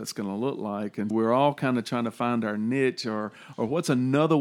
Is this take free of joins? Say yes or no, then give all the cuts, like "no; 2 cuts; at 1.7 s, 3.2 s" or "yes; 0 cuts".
no; 1 cut; at 1.1 s